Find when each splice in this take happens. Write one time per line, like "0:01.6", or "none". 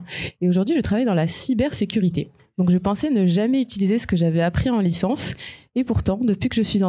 none